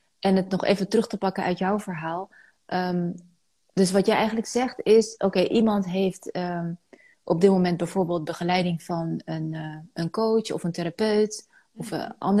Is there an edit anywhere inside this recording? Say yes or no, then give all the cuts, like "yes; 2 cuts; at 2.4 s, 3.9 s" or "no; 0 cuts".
no; 0 cuts